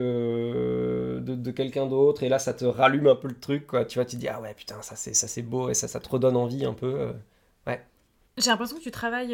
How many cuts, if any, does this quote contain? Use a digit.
1